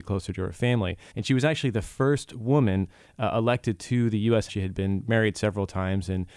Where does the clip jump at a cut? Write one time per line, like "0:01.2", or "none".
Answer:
0:01.1
0:04.5